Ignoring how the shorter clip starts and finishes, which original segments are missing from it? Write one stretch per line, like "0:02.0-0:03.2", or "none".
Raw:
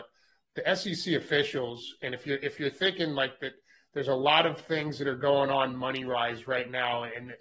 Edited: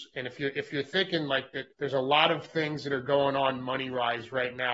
0:03.6-0:03.9

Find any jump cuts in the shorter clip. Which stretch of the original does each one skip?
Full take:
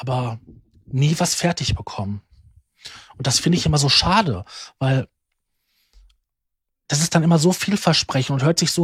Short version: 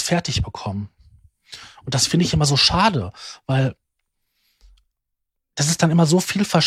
none

